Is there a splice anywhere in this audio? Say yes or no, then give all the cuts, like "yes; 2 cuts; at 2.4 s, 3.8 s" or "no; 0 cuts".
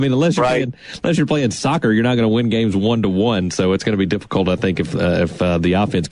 no; 0 cuts